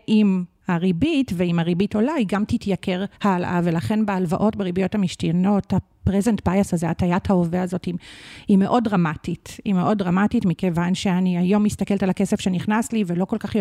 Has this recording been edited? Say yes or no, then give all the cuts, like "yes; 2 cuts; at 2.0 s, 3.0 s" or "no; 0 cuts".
yes; 1 cut; at 3.1 s